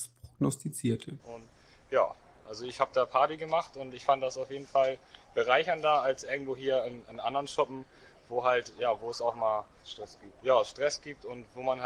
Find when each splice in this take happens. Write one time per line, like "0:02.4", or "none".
0:01.2